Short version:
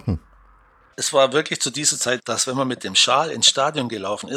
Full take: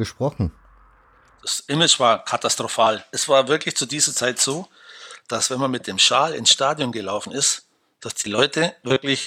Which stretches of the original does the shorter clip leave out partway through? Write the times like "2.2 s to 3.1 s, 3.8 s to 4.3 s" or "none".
1.2 s to 3.1 s, 4.3 s to 5.2 s